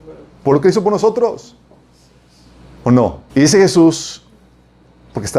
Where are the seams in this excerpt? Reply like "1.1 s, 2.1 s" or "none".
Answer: 3.3 s